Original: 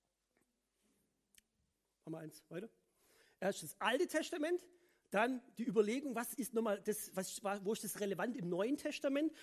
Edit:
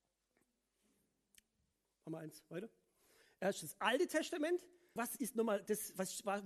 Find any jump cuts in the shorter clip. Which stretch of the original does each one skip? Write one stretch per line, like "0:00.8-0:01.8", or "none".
0:05.0-0:06.1